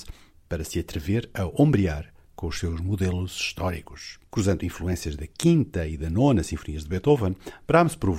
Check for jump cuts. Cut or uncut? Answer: cut